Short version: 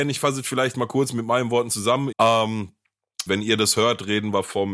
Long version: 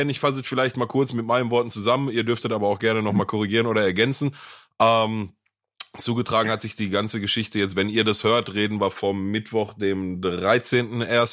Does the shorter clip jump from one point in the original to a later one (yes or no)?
yes